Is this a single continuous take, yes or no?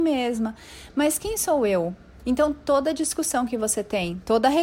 no